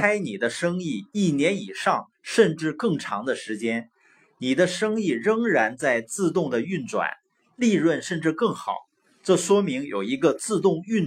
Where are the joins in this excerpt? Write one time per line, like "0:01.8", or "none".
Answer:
none